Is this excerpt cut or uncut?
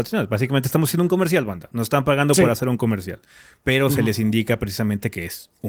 uncut